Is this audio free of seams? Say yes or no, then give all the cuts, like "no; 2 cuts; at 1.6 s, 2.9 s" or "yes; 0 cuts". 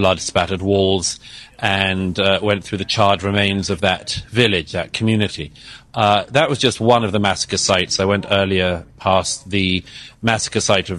yes; 0 cuts